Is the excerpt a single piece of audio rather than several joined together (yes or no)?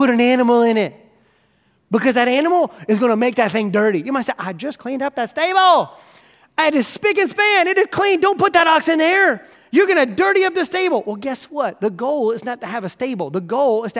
yes